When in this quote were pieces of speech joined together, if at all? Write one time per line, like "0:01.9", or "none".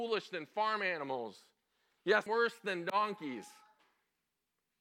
0:02.3